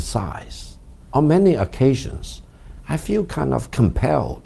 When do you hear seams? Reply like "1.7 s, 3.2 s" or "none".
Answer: 1.1 s